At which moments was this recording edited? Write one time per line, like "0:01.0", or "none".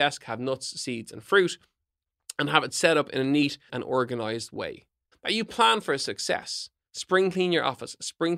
0:03.7
0:05.1
0:06.9